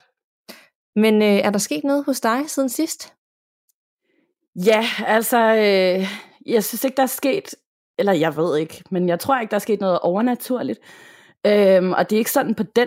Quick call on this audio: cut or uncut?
uncut